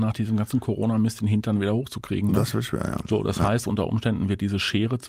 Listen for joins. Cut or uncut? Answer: uncut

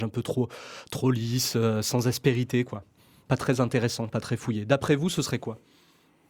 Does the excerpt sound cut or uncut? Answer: uncut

